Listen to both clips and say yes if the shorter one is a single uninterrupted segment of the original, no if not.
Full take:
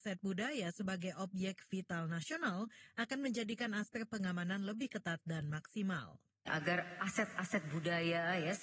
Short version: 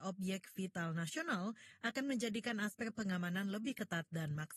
yes